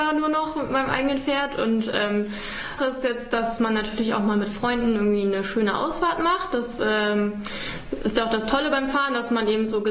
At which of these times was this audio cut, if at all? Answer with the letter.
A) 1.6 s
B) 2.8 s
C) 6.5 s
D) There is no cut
B